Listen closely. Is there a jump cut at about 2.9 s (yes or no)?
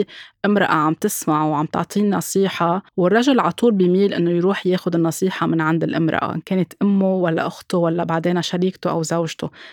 yes